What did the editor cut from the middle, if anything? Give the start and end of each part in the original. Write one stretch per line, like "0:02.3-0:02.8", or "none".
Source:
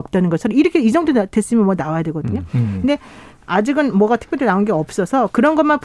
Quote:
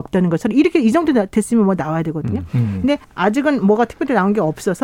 0:03.0-0:03.4